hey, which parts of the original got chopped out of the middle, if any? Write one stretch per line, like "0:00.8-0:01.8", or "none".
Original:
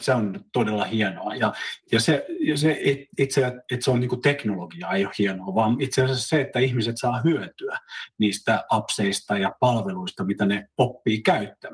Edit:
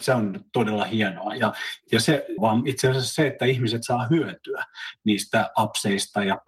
0:02.4-0:05.5